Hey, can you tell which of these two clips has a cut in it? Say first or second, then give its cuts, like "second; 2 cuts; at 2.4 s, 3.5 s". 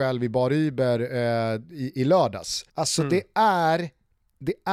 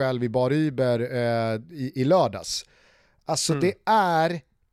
first; 1 cut; at 2.7 s